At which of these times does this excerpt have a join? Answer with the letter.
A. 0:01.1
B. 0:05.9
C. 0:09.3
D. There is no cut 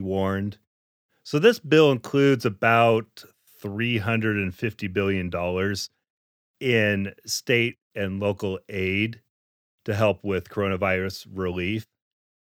A